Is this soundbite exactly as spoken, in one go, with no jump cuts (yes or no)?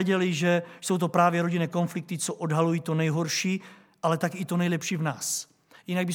yes